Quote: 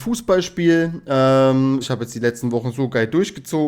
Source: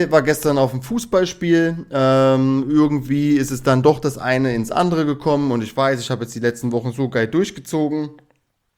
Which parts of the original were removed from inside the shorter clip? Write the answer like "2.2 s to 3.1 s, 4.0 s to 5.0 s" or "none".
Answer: 2.6 s to 6.0 s